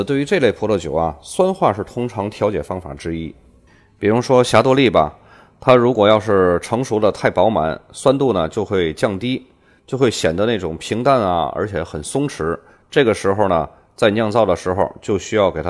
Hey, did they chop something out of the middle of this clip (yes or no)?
no